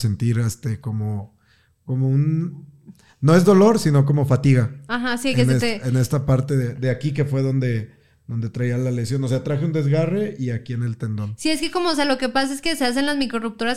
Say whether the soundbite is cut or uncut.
uncut